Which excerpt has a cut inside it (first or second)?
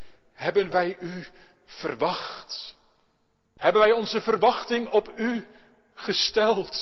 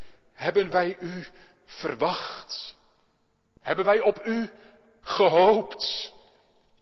first